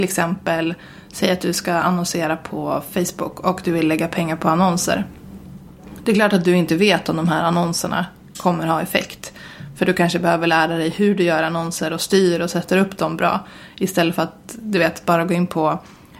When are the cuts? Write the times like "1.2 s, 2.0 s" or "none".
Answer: none